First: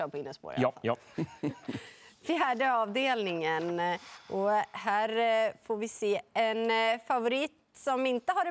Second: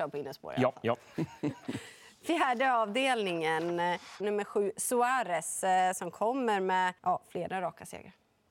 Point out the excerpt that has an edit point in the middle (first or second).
second